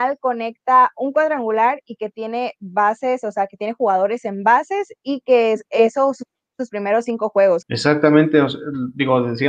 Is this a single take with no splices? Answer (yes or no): no